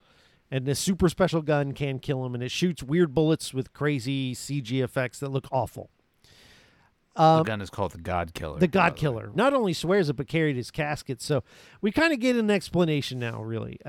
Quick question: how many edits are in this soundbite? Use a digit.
1